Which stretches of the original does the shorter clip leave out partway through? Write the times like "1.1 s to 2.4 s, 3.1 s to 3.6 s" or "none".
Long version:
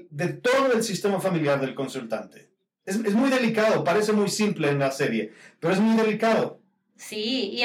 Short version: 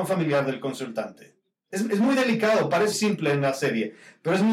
4.1 s to 4.3 s